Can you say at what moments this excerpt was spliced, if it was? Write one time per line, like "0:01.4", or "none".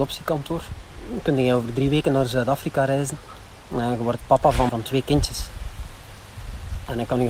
0:04.7